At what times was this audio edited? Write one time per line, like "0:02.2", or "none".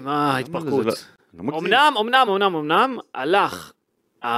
0:02.3